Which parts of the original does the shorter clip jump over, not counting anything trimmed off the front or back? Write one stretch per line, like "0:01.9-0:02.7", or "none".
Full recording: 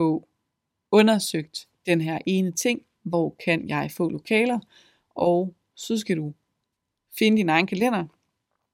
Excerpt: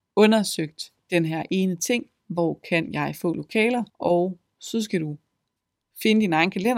0:04.7-0:05.1